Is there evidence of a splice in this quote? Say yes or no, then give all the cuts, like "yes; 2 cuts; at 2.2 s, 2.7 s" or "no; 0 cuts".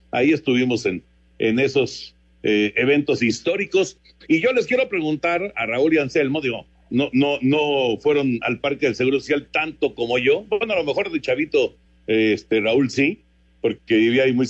no; 0 cuts